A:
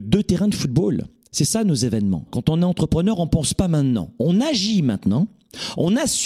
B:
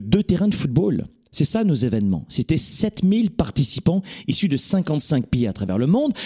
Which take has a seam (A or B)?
A